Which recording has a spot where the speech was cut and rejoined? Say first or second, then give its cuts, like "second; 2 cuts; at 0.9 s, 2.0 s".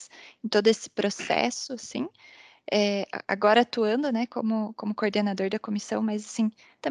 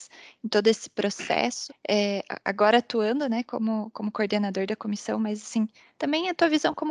second; 1 cut; at 1.7 s